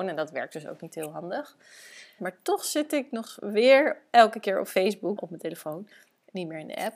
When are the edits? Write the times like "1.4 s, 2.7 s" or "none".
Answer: 2.2 s, 5.2 s